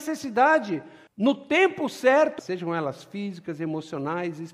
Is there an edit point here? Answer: yes; 2 cuts; at 1.1 s, 2.4 s

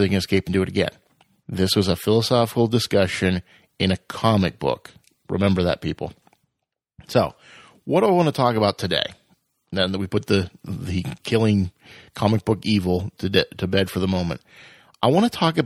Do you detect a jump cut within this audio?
yes; 1 cut; at 1.4 s

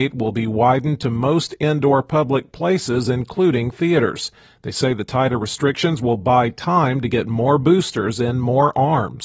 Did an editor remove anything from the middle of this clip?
no; 0 cuts

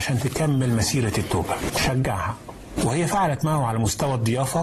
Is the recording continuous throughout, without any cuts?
no; 1 cut; at 1.7 s

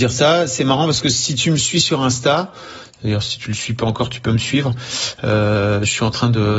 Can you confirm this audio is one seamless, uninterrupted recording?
yes; 0 cuts

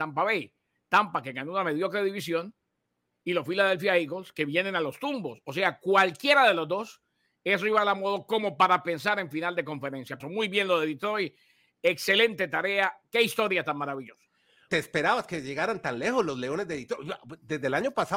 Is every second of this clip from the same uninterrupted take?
no; 2 cuts; at 10.2 s, 14.7 s

